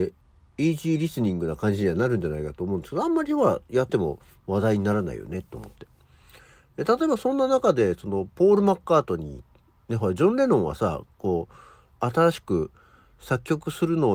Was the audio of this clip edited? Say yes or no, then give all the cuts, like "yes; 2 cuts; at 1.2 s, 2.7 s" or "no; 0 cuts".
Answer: yes; 1 cut; at 3.9 s